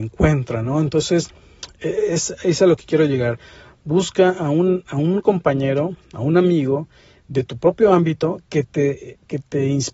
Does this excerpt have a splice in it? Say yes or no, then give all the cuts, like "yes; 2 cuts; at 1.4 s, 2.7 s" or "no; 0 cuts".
no; 0 cuts